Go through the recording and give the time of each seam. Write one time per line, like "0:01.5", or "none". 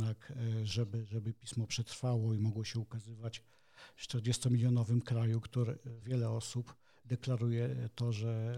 0:06.0